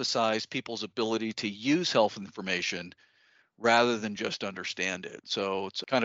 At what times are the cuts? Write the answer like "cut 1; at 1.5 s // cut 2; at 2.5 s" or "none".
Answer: none

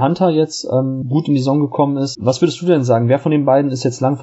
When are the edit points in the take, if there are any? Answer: none

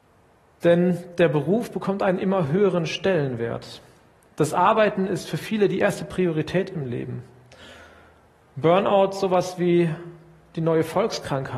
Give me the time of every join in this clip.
none

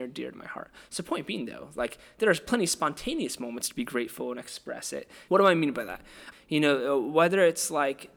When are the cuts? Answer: cut 1; at 5.3 s // cut 2; at 6.3 s

